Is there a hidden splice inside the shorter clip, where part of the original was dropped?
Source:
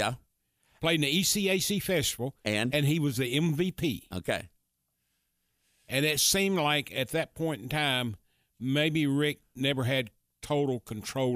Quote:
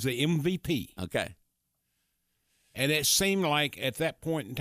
no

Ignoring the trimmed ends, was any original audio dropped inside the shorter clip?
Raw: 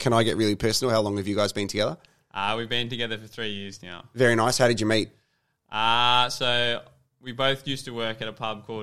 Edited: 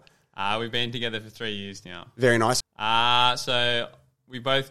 yes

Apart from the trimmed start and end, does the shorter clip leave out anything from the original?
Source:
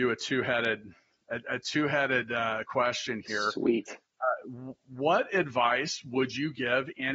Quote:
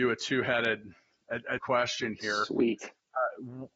yes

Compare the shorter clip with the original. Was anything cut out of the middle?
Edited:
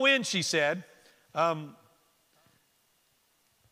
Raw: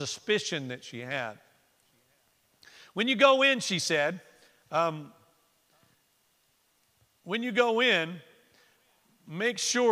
no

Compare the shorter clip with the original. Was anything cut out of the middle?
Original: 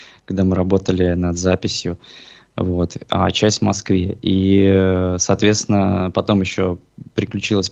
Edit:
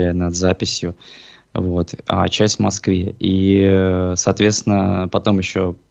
no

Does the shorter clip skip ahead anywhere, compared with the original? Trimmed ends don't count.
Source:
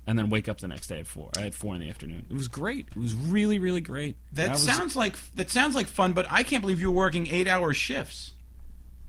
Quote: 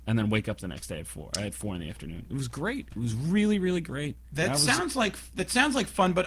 no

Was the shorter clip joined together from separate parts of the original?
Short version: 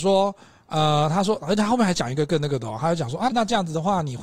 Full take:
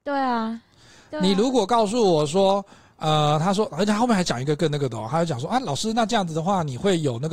yes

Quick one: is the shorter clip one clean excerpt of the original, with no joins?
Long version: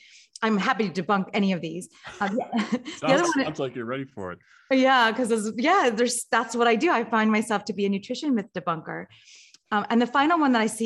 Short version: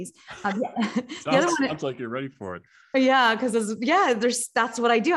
yes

